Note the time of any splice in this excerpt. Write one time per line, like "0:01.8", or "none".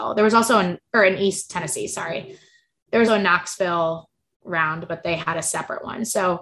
0:03.1